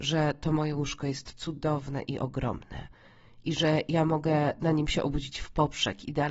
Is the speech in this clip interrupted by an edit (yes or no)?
no